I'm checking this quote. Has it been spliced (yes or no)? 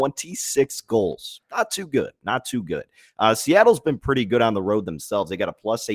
no